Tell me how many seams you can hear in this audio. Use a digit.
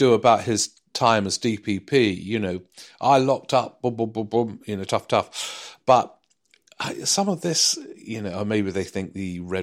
1